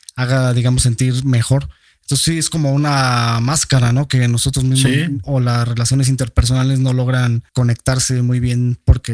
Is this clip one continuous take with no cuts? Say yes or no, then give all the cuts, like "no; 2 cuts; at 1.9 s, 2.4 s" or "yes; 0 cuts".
no; 2 cuts; at 5.2 s, 7.5 s